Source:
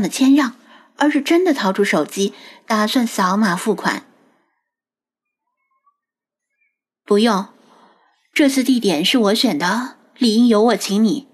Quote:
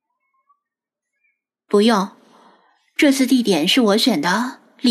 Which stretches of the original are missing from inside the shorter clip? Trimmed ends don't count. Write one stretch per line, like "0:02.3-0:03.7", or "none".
none